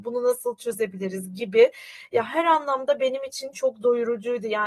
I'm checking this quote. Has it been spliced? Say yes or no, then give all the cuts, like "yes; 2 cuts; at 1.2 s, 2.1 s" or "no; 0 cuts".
no; 0 cuts